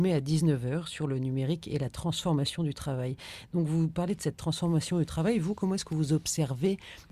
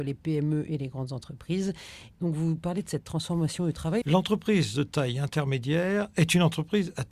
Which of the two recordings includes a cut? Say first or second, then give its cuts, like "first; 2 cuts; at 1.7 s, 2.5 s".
second; 2 cuts; at 2.1 s, 4.0 s